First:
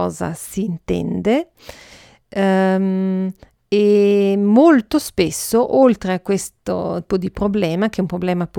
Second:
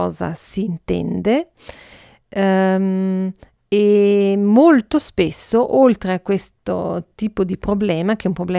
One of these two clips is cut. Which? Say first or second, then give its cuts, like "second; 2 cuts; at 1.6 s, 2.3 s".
first; 1 cut; at 7.1 s